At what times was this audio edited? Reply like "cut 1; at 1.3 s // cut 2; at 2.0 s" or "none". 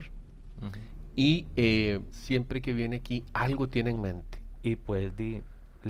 cut 1; at 2.1 s // cut 2; at 4.6 s